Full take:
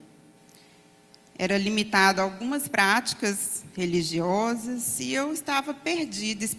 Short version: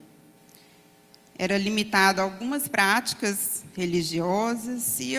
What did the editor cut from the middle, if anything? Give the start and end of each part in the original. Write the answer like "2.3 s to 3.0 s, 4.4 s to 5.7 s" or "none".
none